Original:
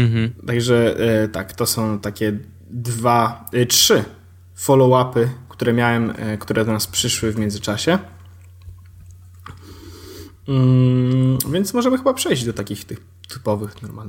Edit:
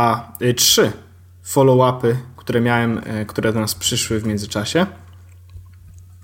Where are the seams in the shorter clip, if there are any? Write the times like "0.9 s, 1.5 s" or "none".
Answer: none